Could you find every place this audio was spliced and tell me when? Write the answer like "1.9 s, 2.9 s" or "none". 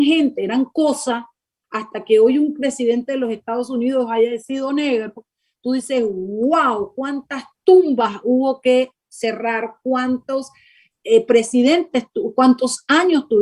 none